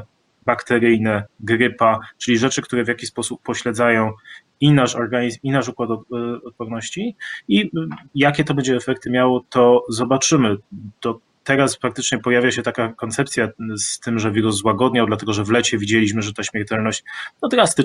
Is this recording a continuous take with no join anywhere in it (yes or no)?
no